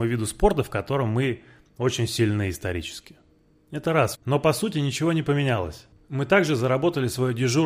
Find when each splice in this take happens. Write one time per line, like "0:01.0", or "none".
0:04.1